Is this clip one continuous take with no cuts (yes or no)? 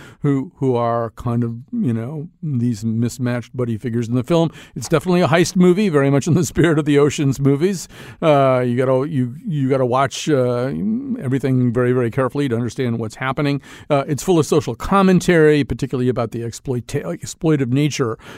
yes